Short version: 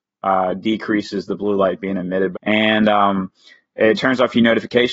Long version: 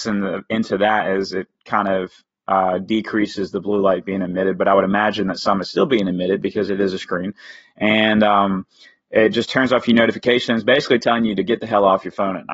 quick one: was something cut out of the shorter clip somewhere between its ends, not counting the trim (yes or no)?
yes